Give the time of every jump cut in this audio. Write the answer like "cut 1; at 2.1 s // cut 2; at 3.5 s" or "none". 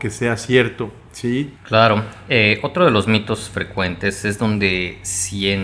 cut 1; at 1.6 s